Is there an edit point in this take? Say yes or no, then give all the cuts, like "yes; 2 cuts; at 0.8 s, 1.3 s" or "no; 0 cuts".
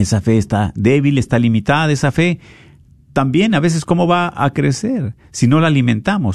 no; 0 cuts